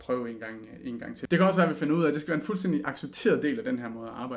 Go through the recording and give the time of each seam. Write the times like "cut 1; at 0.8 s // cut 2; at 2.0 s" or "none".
cut 1; at 1.3 s

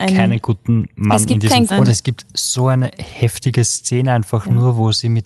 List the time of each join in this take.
cut 1; at 1.7 s

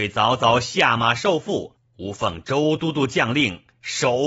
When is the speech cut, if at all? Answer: none

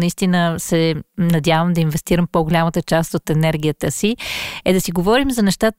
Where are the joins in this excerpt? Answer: none

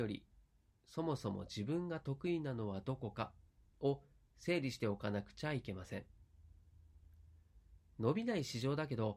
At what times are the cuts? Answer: none

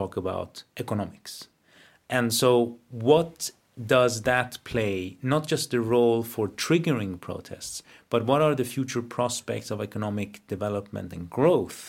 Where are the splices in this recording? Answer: none

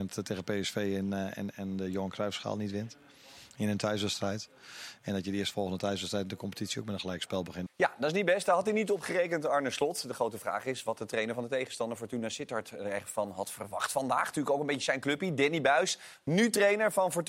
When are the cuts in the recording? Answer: cut 1; at 7.7 s

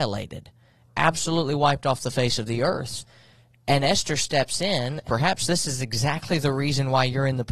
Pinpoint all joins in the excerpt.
cut 1; at 5.0 s

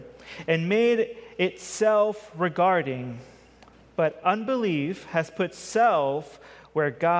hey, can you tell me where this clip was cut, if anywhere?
none

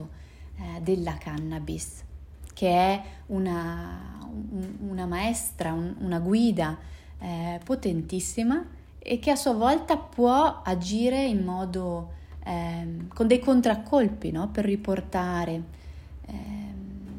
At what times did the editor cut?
none

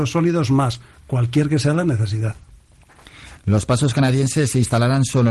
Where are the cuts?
cut 1; at 3.4 s

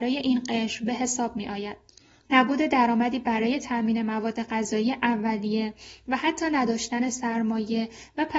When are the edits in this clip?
cut 1; at 2.2 s

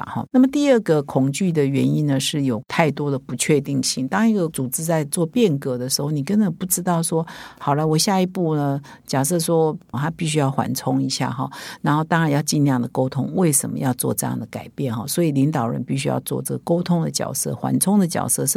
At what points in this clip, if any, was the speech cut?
cut 1; at 9.9 s

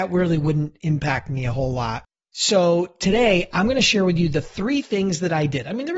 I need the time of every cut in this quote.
none

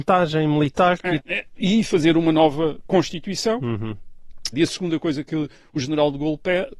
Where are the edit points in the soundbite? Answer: cut 1; at 1.2 s // cut 2; at 4.5 s

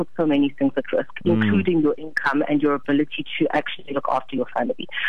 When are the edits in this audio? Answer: none

